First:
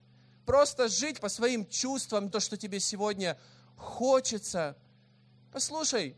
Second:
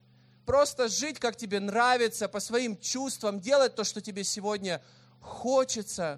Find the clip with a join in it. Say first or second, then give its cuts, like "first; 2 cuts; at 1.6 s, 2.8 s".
first; 2 cuts; at 1.2 s, 2.3 s